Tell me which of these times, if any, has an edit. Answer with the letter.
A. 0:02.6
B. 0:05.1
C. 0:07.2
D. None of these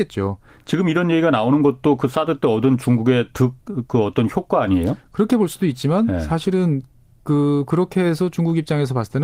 D